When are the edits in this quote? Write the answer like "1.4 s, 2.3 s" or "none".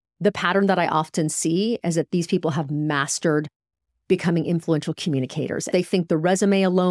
5.7 s